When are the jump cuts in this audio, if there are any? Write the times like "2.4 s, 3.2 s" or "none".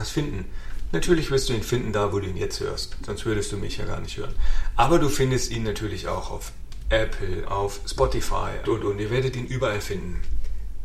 7.4 s, 8.6 s